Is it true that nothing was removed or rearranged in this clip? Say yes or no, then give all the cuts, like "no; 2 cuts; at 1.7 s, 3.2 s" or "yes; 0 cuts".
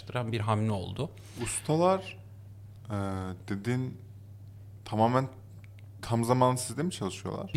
yes; 0 cuts